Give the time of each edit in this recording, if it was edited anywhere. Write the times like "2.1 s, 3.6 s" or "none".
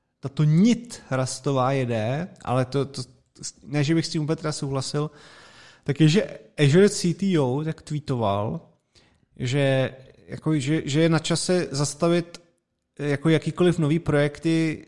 none